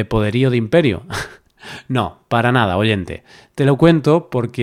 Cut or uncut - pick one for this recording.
uncut